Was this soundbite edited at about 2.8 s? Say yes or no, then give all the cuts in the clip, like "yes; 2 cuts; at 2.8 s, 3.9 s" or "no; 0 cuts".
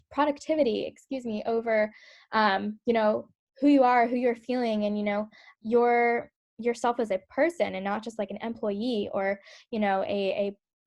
no; 1 cut; at 5.5 s